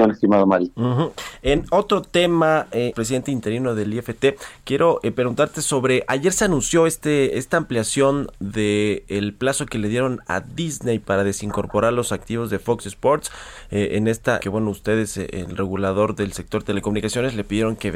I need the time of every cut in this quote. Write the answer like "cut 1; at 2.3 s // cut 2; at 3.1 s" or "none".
cut 1; at 2.9 s // cut 2; at 14.4 s